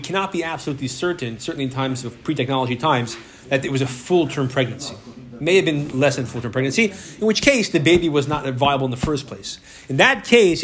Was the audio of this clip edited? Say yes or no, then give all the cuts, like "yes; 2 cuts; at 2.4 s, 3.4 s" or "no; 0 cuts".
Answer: no; 0 cuts